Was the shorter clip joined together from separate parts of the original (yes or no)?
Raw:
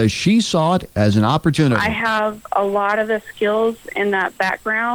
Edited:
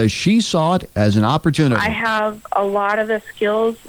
no